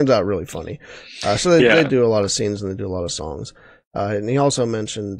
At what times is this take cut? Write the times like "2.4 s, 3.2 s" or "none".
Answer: none